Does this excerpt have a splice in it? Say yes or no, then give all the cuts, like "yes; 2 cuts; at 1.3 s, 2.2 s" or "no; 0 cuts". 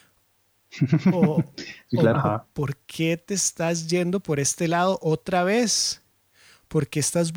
no; 0 cuts